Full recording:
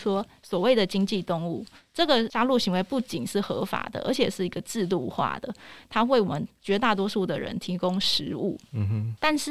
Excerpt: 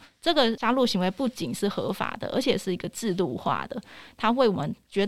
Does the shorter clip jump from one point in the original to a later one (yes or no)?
no